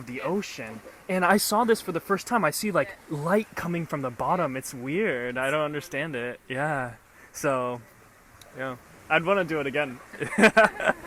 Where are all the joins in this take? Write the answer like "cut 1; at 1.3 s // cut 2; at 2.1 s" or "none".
cut 1; at 3.0 s